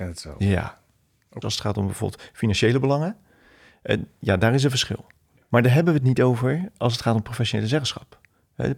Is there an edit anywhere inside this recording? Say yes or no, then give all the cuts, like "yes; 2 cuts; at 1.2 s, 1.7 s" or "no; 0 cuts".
yes; 1 cut; at 1.4 s